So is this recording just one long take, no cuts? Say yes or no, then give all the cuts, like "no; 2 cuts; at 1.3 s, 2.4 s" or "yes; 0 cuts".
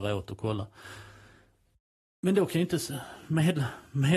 yes; 0 cuts